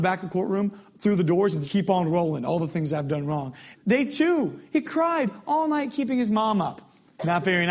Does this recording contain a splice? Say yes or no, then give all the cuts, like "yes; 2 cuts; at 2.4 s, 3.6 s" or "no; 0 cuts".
yes; 2 cuts; at 1.6 s, 3.7 s